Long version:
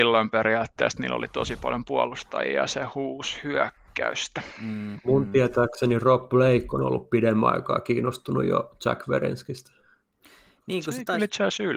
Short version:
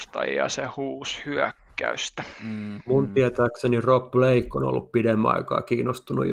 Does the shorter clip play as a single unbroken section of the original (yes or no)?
yes